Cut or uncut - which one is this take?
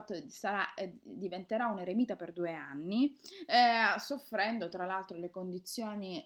uncut